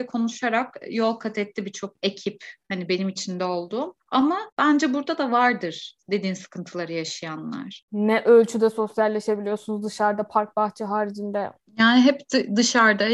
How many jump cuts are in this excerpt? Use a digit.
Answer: 0